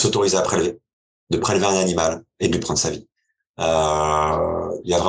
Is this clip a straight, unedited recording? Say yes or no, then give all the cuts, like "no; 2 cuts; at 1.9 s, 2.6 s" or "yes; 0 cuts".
no; 2 cuts; at 1.2 s, 3.4 s